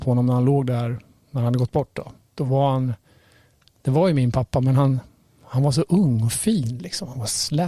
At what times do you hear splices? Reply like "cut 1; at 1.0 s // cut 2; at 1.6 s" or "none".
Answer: cut 1; at 2.3 s

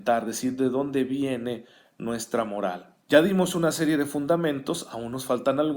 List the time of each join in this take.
cut 1; at 3.0 s

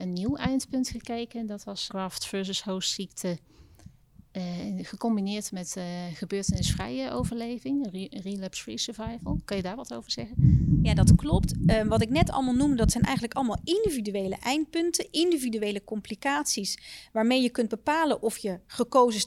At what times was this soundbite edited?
cut 1; at 1.9 s

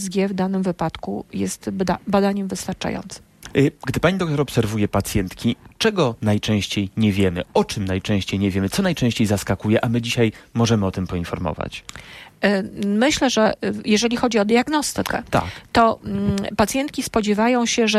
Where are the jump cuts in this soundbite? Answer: none

